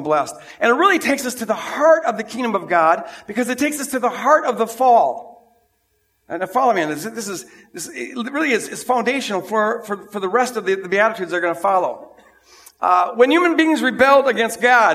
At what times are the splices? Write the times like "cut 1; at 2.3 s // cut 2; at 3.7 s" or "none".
none